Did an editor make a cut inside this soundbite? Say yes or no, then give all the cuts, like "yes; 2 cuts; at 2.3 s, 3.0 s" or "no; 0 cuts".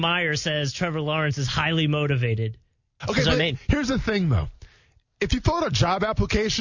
yes; 1 cut; at 3.0 s